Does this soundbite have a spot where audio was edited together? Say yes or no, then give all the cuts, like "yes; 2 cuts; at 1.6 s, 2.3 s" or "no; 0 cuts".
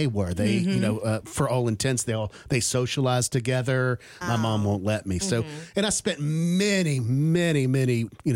yes; 1 cut; at 4.2 s